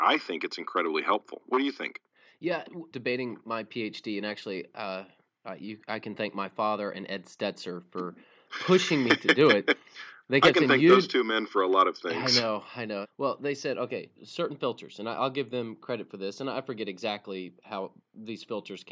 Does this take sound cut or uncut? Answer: cut